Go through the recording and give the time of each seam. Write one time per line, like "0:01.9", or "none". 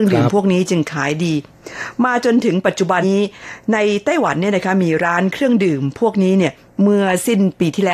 0:03.0